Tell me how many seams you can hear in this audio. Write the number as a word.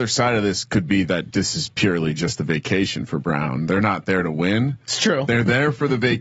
zero